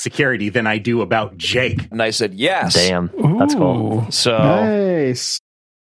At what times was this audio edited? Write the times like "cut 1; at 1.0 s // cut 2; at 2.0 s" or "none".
cut 1; at 1.9 s